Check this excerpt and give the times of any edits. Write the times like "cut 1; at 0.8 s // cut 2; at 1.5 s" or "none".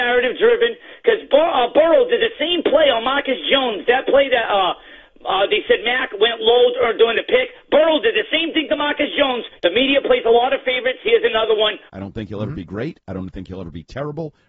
cut 1; at 9.6 s // cut 2; at 11.9 s